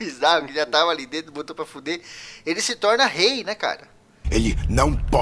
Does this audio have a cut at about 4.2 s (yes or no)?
yes